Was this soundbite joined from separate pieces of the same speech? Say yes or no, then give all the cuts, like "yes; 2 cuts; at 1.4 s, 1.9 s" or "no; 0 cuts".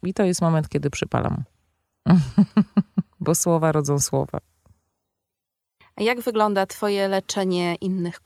no; 0 cuts